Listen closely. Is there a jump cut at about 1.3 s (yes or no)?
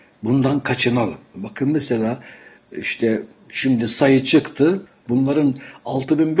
yes